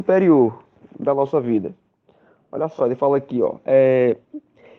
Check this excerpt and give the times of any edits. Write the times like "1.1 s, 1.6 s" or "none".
none